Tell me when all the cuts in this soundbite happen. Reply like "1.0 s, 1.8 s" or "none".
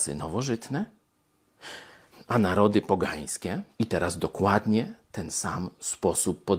2.1 s, 3.7 s